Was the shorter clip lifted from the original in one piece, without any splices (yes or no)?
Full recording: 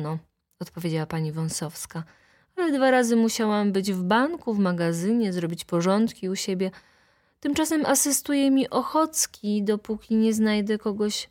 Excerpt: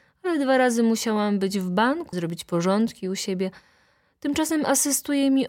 no